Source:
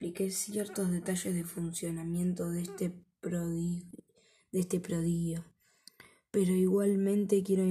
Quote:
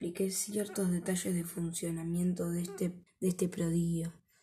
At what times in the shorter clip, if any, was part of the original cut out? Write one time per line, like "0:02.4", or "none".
0:03.1